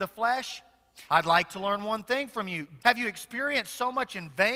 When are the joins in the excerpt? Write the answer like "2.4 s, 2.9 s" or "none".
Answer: 1.1 s, 2.8 s